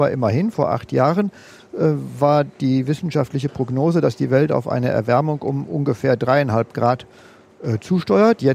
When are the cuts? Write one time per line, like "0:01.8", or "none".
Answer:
none